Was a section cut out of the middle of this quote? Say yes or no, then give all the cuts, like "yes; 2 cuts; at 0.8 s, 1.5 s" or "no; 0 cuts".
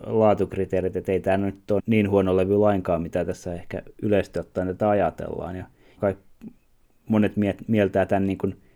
yes; 2 cuts; at 1.8 s, 6.0 s